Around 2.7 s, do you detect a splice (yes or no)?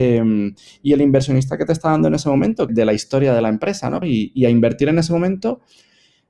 yes